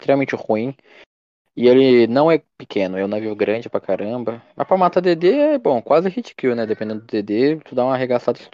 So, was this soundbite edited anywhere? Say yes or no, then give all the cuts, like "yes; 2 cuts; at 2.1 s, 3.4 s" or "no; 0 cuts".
no; 0 cuts